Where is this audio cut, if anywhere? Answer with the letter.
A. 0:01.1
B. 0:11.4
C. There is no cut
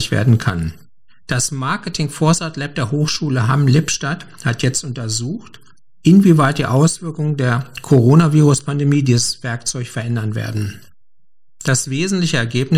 A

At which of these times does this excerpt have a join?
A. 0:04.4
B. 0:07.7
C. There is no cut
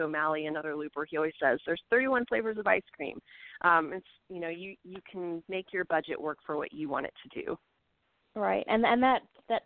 C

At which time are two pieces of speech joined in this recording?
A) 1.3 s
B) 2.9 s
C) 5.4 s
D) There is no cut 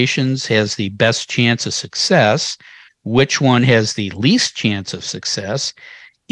D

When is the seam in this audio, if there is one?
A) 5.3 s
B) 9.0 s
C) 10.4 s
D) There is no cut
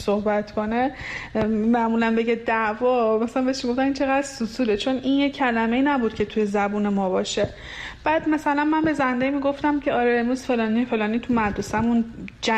D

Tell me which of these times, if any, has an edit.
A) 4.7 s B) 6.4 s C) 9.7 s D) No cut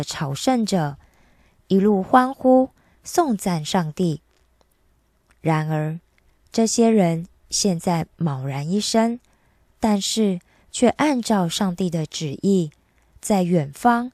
D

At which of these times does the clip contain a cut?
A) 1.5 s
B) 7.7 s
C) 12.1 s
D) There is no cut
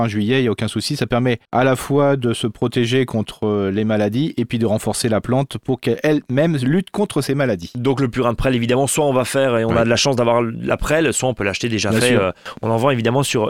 A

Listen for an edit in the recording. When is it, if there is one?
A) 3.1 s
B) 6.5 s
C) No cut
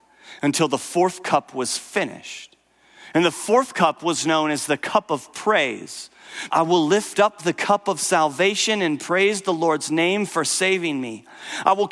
B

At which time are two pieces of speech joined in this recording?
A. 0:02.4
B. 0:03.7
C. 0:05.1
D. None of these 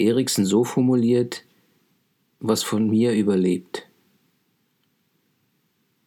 A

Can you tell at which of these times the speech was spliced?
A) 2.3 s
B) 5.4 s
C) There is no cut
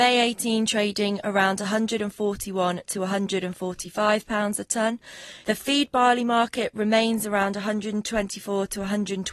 B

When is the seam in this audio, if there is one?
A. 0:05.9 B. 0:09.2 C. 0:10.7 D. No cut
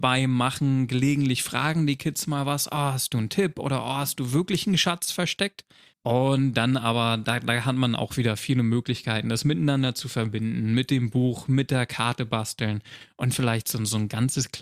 A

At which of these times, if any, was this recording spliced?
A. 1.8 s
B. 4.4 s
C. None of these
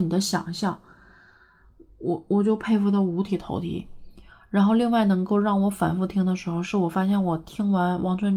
C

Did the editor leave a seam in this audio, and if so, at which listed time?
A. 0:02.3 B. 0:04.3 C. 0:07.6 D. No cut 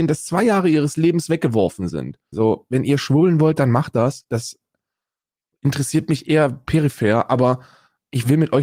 A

